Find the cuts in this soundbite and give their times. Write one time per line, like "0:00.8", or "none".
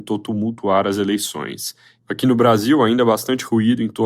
0:02.0